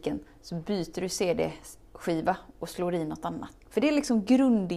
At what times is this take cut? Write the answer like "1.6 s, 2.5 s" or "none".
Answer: 3.6 s